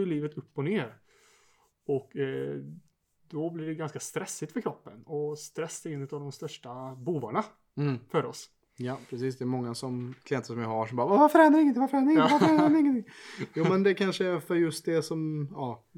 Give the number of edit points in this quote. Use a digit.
0